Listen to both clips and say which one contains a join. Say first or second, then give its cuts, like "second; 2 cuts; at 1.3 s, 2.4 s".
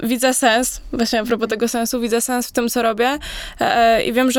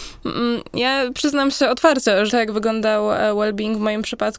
second; 1 cut; at 2.3 s